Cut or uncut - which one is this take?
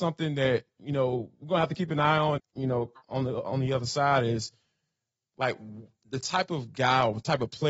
cut